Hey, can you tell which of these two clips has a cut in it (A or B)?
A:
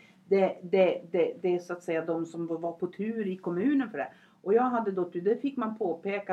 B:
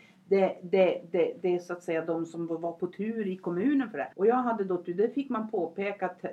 B